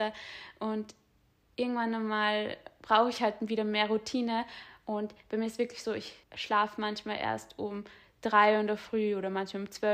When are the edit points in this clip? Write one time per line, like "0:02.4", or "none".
0:06.2